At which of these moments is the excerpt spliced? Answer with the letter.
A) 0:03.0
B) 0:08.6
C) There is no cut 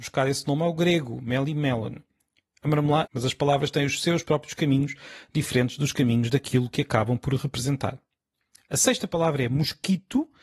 A